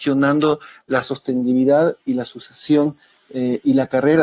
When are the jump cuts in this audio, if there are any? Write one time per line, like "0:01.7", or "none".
none